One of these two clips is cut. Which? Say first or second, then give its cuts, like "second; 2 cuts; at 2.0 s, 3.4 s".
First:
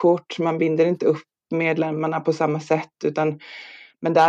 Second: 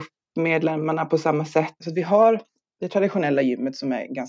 second; 1 cut; at 1.8 s